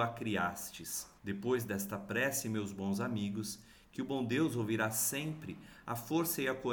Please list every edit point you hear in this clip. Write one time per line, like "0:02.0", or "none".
0:01.2